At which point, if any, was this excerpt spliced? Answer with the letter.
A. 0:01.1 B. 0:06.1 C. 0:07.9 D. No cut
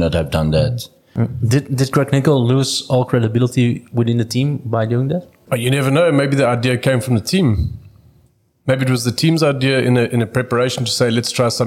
D